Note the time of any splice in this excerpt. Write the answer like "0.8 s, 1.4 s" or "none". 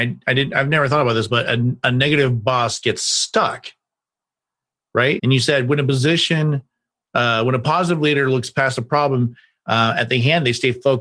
5.2 s